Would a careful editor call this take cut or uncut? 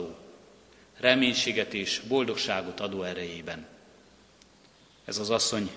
uncut